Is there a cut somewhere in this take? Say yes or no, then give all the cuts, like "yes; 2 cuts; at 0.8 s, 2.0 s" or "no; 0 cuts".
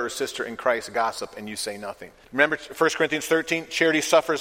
yes; 1 cut; at 2.2 s